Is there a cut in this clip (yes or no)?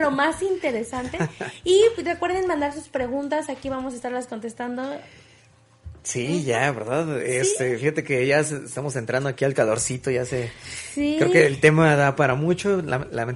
no